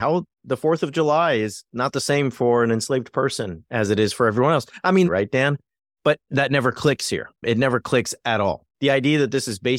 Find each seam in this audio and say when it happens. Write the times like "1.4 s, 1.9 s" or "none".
5.1 s, 6.3 s, 8.7 s